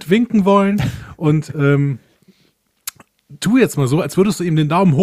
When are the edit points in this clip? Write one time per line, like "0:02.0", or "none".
none